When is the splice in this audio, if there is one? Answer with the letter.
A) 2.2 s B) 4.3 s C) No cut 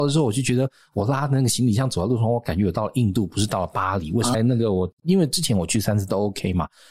B